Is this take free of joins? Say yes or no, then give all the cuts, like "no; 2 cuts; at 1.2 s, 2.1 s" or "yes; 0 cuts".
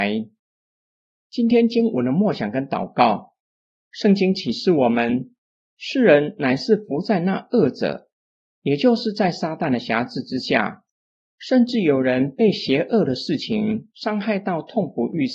yes; 0 cuts